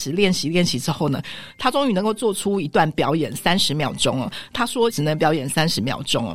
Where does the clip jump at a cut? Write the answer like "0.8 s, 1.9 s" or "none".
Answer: 4.9 s